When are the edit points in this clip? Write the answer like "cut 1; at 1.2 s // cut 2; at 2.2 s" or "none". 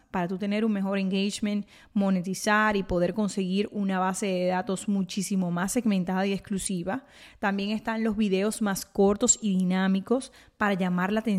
none